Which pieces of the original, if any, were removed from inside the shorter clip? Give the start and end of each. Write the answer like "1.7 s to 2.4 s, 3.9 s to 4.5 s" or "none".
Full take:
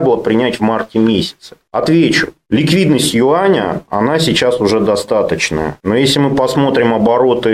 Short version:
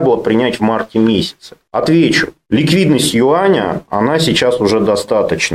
none